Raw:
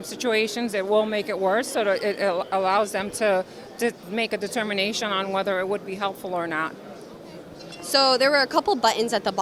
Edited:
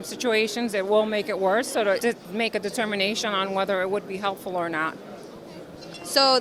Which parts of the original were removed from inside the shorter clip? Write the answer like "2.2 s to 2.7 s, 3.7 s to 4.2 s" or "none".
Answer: 2.0 s to 3.8 s